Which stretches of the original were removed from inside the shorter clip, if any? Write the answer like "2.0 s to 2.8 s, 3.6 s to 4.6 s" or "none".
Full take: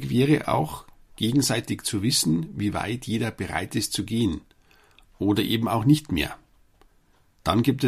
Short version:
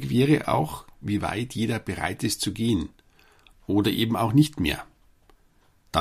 1.0 s to 2.5 s